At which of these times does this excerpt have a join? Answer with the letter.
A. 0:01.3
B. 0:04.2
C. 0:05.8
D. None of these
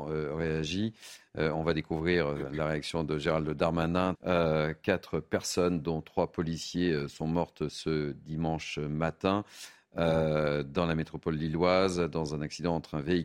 B